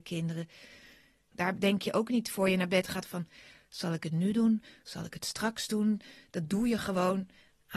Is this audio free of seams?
no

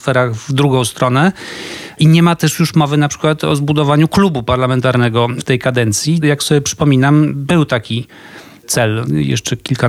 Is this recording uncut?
yes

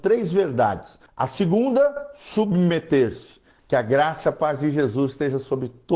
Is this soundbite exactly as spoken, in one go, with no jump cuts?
no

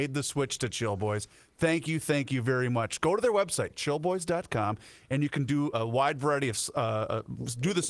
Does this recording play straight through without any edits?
no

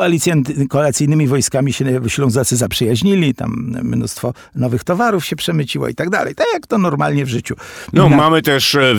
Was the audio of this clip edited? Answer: no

